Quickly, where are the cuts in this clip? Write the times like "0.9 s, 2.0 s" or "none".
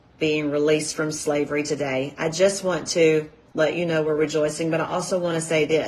none